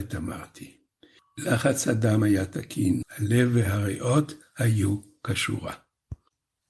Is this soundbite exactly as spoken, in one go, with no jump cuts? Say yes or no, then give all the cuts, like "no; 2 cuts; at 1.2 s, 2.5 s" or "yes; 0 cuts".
no; 2 cuts; at 1.2 s, 3.0 s